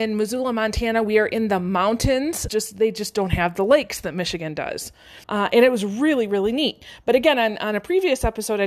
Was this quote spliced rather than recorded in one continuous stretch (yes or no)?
yes